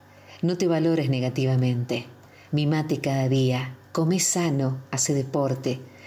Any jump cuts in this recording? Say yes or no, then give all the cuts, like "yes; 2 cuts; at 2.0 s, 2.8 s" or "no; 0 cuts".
yes; 1 cut; at 2.5 s